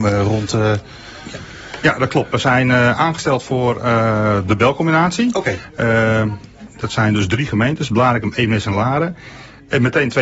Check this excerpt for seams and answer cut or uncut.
uncut